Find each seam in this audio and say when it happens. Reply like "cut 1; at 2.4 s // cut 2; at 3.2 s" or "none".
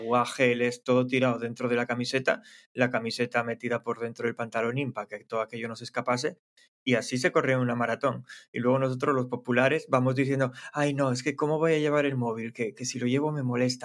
none